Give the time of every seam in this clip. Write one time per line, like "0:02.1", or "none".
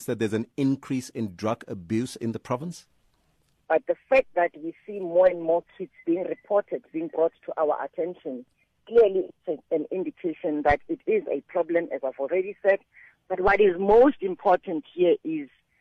0:03.6